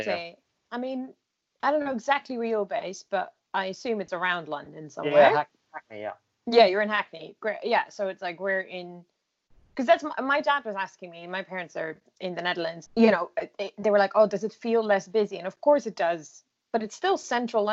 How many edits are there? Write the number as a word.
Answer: one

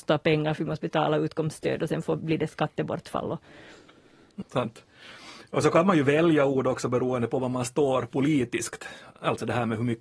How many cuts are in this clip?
one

